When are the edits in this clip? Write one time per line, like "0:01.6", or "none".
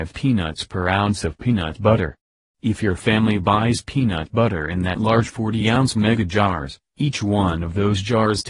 none